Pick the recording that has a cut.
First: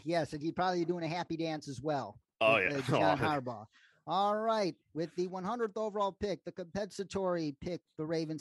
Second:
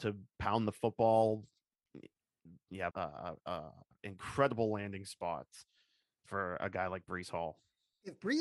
second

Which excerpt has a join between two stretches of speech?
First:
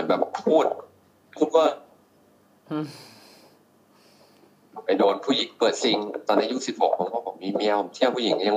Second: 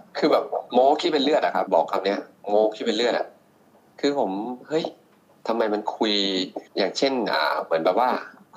second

